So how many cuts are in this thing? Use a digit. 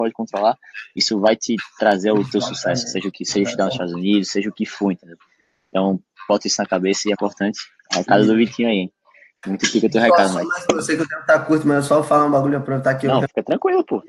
1